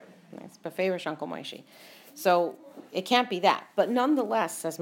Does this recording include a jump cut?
no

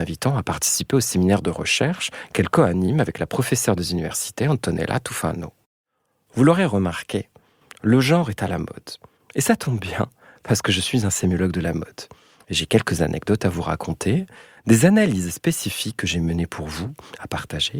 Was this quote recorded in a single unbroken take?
yes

